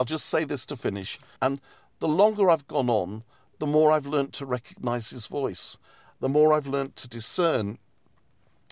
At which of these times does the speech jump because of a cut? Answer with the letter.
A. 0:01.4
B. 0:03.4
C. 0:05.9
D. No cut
A